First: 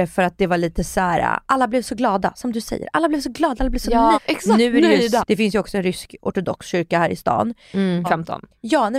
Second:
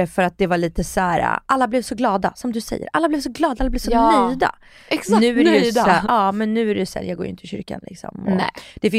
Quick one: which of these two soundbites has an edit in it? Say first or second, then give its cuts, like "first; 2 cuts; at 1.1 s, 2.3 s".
first; 3 cuts; at 4.1 s, 5.2 s, 8.0 s